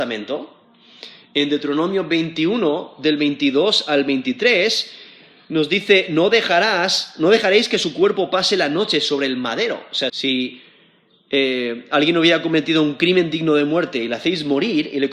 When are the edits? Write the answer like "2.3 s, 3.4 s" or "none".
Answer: 10.1 s